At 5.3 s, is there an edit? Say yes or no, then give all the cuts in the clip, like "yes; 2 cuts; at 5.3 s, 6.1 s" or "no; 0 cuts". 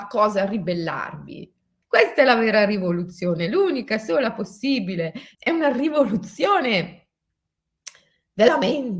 yes; 2 cuts; at 1.8 s, 5.3 s